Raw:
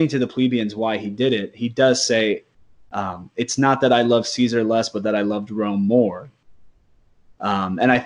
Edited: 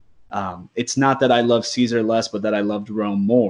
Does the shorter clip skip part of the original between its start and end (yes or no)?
no